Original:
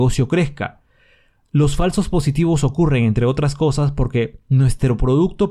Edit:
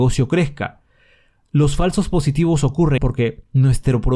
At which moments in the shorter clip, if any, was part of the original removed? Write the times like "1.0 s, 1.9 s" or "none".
3.0 s